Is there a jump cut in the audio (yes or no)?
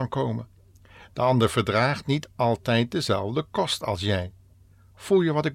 no